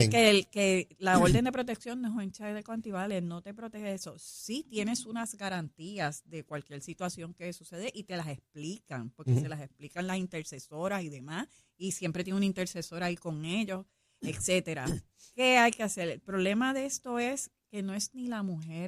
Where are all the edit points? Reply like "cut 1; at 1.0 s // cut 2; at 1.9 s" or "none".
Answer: none